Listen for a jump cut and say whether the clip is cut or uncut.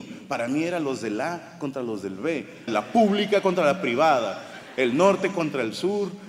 cut